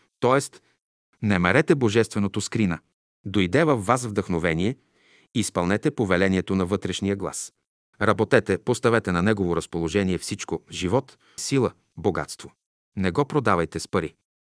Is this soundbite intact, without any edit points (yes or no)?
no